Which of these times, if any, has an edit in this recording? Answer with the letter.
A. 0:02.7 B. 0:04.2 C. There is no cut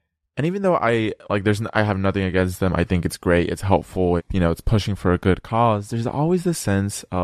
B